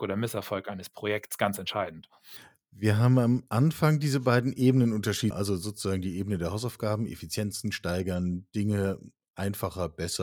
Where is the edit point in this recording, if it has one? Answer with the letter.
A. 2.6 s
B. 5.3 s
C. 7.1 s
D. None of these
B